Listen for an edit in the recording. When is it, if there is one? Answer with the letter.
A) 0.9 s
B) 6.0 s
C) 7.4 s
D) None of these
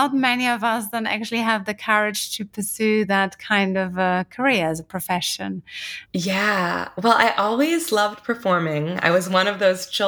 B